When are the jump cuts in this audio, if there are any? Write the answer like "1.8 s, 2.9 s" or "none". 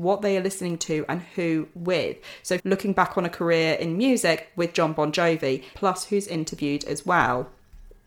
2.6 s, 5.7 s